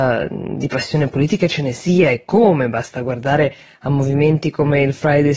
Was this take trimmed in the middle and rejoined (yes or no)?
no